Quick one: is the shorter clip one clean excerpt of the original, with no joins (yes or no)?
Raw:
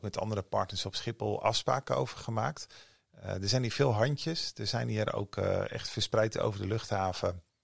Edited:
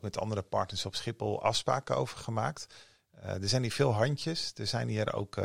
yes